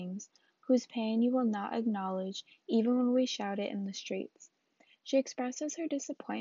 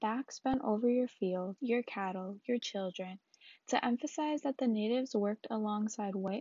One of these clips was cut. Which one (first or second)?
second